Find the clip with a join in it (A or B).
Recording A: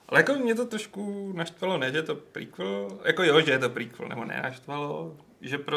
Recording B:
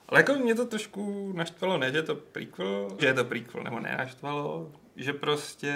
B